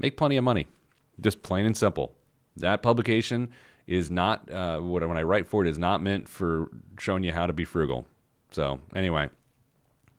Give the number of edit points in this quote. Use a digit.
0